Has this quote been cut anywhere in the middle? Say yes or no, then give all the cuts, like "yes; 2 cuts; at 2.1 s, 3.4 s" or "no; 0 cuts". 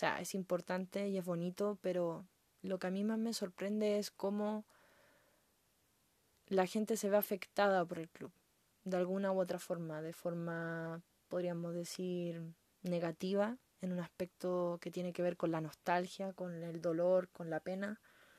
no; 0 cuts